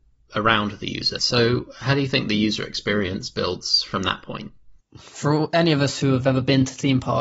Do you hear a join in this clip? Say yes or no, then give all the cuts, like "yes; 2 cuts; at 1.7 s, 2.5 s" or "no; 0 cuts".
yes; 1 cut; at 1.2 s